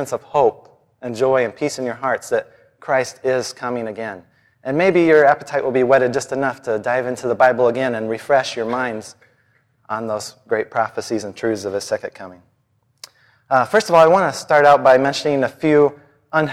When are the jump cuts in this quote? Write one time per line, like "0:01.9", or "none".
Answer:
none